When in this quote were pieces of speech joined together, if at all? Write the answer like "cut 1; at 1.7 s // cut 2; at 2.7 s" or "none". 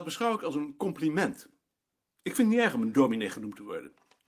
none